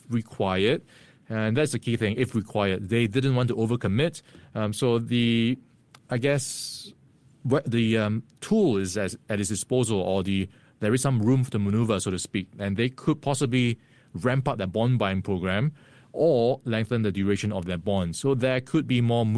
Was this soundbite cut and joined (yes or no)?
no